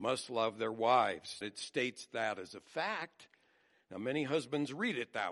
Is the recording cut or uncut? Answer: cut